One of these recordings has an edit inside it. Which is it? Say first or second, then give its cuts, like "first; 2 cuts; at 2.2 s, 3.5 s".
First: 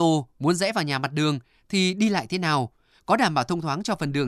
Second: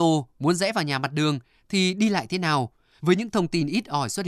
second; 1 cut; at 3.0 s